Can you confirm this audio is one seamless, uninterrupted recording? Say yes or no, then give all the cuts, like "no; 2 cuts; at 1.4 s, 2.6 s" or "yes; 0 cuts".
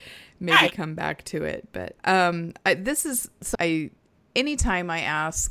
no; 2 cuts; at 2.0 s, 3.5 s